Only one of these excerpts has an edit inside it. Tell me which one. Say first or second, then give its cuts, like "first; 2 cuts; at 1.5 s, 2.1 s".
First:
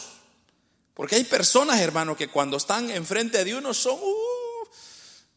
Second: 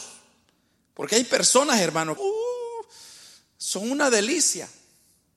second; 1 cut; at 2.2 s